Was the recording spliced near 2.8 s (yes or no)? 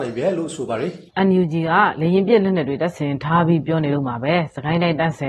no